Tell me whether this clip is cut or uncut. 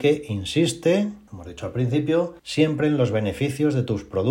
cut